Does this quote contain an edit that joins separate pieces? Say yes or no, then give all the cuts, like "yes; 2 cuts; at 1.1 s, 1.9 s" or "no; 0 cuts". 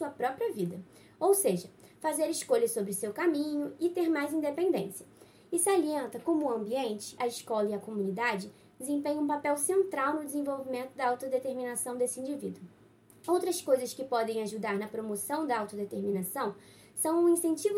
yes; 1 cut; at 7.2 s